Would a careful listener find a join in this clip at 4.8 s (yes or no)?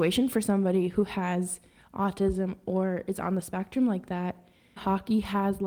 yes